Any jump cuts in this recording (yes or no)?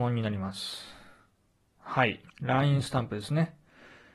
yes